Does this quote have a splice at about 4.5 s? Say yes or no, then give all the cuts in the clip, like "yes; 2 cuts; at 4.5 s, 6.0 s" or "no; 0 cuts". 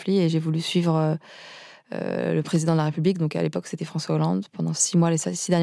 no; 0 cuts